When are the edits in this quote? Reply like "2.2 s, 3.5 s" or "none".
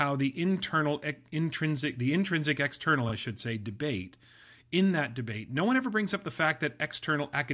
none